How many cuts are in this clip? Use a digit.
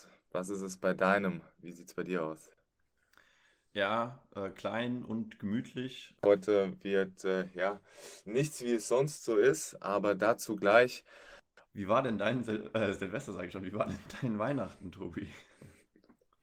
2